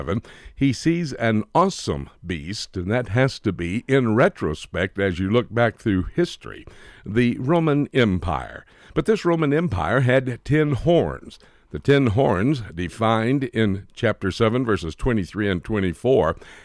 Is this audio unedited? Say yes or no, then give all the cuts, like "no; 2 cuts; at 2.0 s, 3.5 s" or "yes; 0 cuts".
yes; 0 cuts